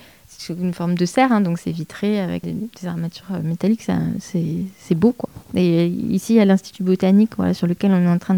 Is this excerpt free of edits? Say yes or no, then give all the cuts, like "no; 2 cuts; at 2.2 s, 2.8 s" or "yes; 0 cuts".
no; 1 cut; at 2.4 s